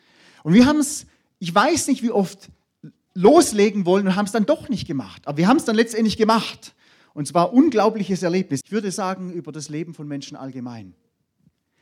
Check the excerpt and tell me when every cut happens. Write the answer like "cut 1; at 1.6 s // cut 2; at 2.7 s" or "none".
cut 1; at 8.6 s